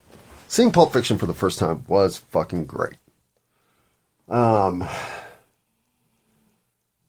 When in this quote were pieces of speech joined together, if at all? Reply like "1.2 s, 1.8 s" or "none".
none